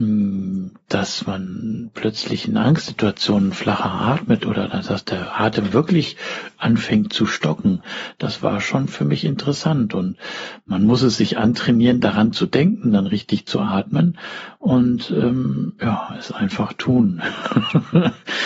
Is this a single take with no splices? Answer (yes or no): yes